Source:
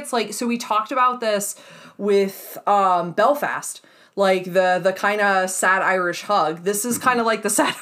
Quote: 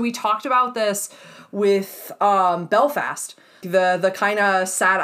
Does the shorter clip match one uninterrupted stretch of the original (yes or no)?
no